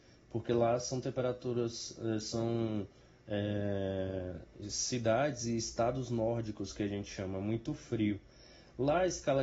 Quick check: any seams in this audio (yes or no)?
no